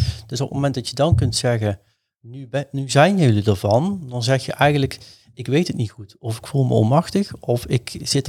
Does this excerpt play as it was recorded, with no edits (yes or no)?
yes